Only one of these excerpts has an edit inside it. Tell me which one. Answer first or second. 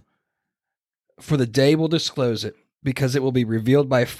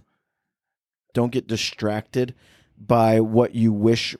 second